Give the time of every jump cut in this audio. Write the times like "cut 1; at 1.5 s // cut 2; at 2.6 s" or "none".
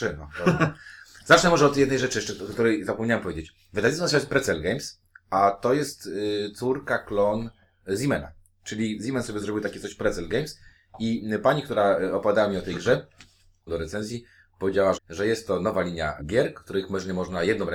cut 1; at 13.7 s // cut 2; at 14.9 s // cut 3; at 16.2 s